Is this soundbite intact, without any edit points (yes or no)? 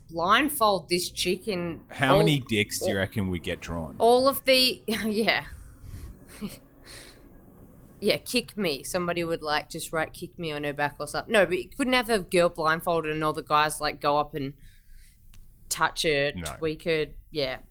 yes